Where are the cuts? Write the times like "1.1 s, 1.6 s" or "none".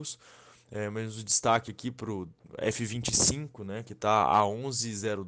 none